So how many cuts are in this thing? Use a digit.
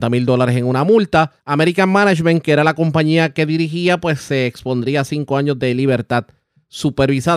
1